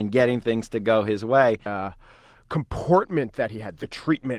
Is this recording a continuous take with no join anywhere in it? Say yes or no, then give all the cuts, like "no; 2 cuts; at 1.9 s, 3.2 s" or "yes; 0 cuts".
no; 1 cut; at 1.7 s